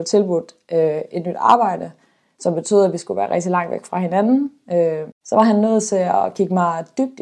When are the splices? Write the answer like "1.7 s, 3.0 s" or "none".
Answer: 5.1 s